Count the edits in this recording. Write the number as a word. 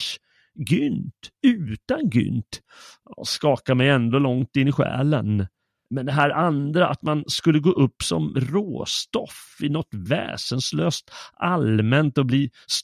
one